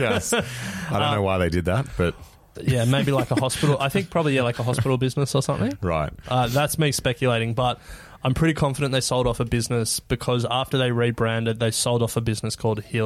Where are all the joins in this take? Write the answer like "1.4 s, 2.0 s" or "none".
2.6 s

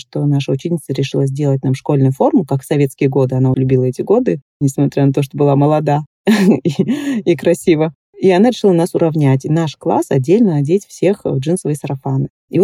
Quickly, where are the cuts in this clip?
3.5 s

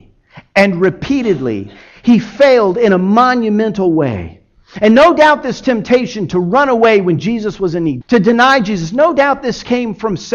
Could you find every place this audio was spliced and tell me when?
8.0 s

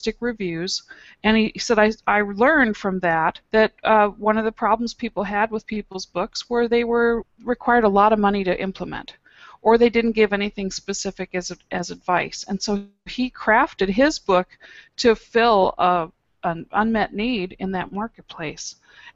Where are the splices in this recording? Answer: 3.5 s

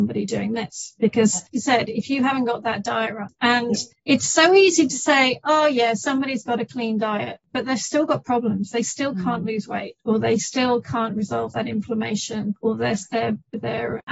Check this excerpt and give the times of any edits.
1.5 s

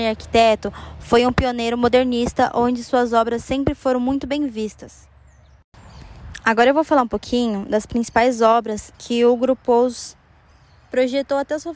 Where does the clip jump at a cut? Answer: 8.9 s

